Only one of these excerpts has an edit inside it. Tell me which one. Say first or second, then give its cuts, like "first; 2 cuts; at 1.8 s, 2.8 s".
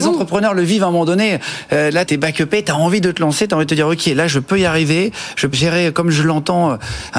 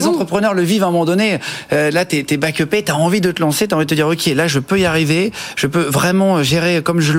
first; 2 cuts; at 2.1 s, 5.5 s